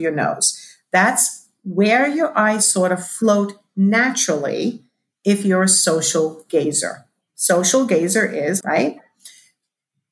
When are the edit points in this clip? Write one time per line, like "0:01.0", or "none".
0:08.6